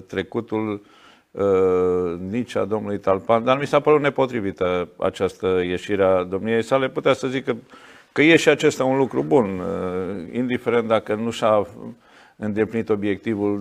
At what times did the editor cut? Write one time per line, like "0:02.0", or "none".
none